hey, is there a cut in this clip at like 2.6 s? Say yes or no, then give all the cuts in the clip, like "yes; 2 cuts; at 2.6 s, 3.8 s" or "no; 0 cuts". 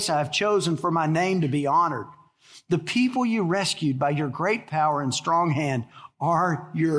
no; 0 cuts